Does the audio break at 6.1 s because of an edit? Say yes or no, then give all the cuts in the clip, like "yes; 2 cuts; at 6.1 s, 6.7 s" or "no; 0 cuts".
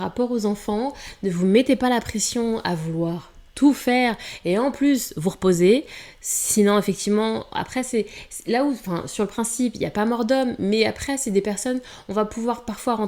no; 0 cuts